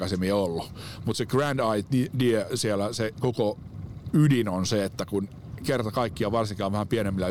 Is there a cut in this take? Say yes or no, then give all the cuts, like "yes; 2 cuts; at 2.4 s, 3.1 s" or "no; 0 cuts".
no; 0 cuts